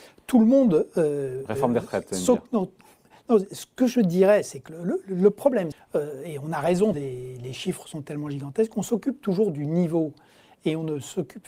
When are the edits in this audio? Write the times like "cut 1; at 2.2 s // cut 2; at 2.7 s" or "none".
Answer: cut 1; at 5.7 s // cut 2; at 6.9 s